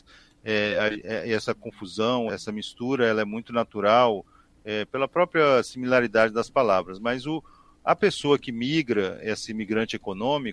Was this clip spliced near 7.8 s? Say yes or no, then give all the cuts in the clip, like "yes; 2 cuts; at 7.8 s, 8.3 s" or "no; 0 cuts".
no; 1 cut; at 2.3 s